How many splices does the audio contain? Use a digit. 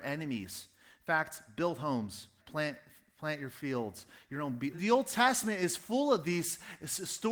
2